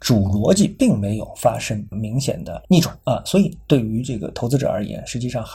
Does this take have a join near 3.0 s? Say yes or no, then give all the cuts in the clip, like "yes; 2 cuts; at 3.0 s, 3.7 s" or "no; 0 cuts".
yes; 1 cut; at 3.0 s